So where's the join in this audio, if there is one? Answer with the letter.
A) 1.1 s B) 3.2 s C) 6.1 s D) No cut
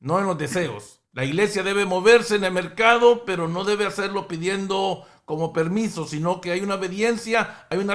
A